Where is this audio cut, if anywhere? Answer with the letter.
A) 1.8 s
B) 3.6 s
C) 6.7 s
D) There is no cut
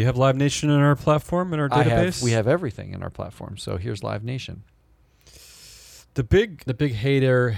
C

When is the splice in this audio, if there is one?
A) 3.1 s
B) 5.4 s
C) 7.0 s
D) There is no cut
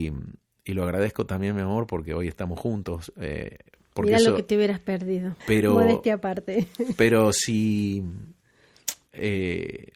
B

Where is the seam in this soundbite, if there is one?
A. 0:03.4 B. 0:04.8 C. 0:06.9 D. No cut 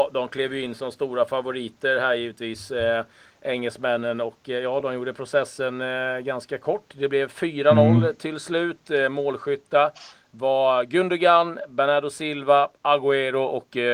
D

